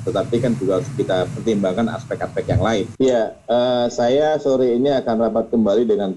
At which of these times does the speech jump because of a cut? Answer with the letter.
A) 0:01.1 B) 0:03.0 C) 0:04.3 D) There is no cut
B